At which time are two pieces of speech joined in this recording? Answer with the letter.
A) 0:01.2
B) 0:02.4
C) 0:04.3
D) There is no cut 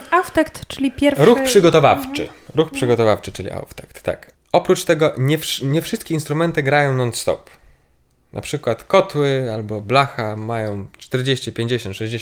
C